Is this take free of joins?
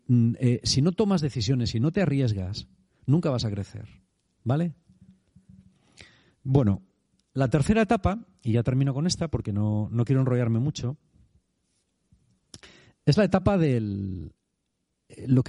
yes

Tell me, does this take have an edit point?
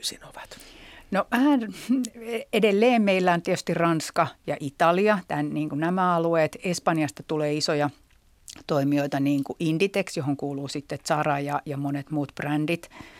no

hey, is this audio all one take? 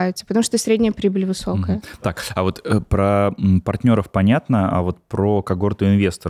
yes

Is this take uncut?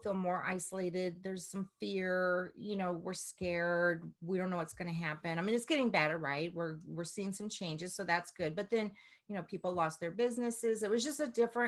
yes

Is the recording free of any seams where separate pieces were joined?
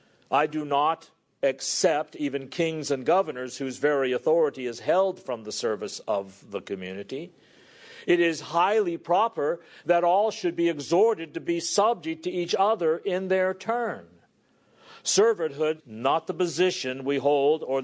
no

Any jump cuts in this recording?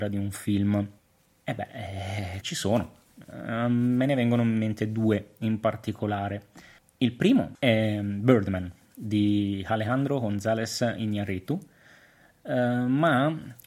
yes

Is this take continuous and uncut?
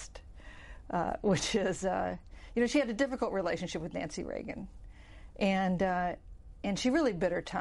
yes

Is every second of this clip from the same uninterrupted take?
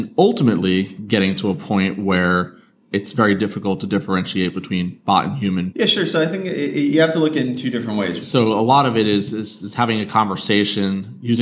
no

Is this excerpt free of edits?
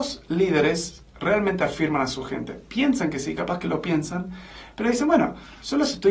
yes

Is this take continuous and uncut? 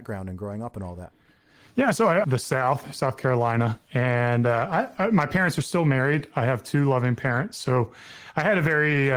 no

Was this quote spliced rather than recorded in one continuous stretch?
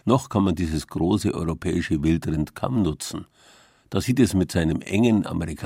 no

